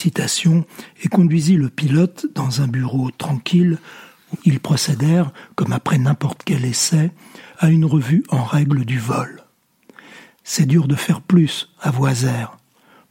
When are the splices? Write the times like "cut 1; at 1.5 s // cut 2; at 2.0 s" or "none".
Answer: cut 1; at 4.3 s

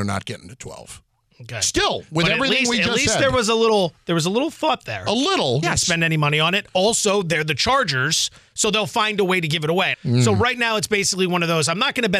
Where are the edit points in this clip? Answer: cut 1; at 5.6 s // cut 2; at 9.9 s

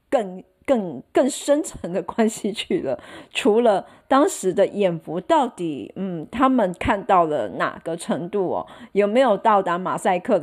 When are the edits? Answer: none

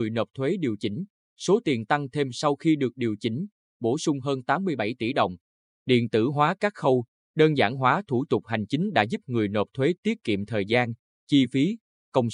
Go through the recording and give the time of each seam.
cut 1; at 5.7 s

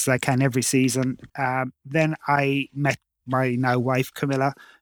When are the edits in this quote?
cut 1; at 1.3 s

